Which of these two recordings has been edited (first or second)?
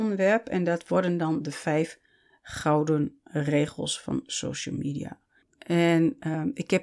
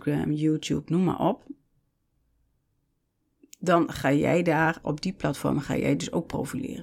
first